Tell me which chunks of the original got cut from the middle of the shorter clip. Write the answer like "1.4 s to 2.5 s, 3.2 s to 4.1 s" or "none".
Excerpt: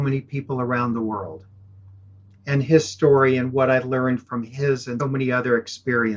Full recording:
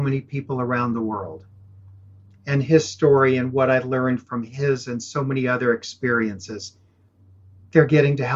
5.0 s to 5.2 s